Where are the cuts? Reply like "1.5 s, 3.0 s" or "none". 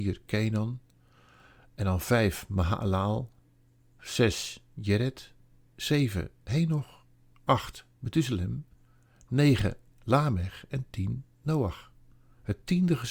none